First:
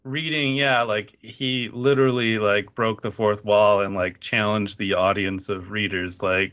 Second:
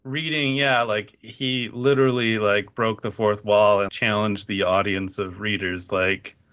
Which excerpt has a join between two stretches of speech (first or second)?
second